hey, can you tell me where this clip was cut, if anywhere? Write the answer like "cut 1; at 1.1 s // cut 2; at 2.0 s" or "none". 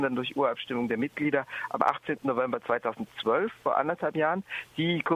none